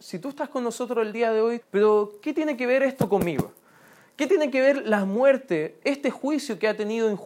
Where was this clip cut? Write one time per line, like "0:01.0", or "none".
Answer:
0:01.6